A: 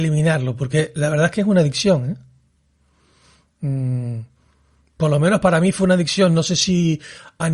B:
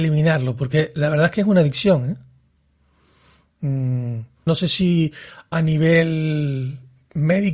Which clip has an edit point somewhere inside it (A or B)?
B